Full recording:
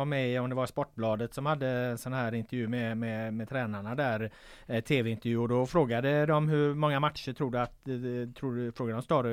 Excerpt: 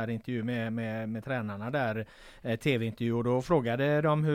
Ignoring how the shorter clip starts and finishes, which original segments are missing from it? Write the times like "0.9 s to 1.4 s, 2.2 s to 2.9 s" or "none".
none